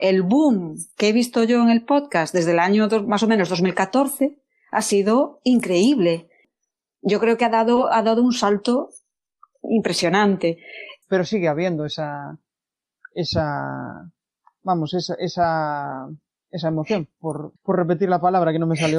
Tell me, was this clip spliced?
yes; 2 cuts; at 11.0 s, 17.6 s

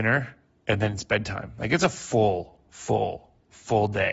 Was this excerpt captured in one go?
no; 1 cut; at 2.6 s

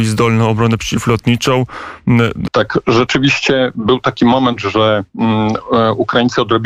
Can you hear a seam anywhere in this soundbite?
yes; 1 cut; at 2.5 s

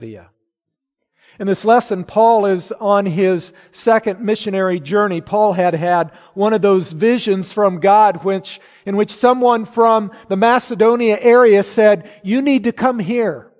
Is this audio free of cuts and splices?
yes; 0 cuts

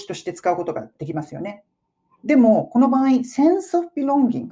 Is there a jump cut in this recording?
no; 0 cuts

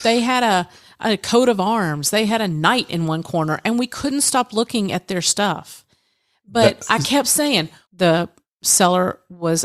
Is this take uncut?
no; 1 cut; at 7.8 s

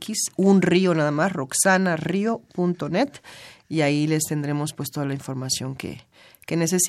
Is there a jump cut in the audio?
no; 0 cuts

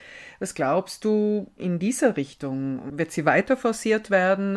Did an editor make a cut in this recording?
yes; 1 cut; at 1.6 s

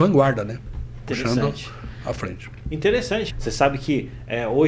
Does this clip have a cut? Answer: yes; 1 cut; at 3.3 s

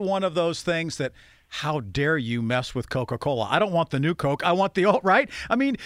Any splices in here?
no; 0 cuts

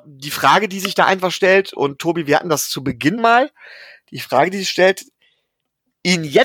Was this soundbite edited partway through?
yes; 1 cut; at 3.2 s

